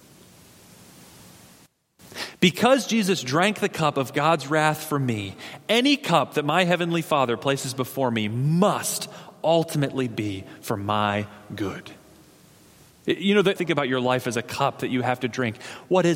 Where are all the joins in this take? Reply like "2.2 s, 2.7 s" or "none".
13.6 s